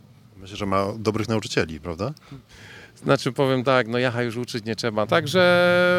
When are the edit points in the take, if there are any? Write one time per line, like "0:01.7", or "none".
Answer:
0:05.0